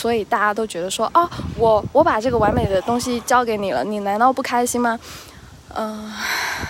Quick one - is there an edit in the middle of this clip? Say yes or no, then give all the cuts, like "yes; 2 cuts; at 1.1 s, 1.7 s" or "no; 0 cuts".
no; 0 cuts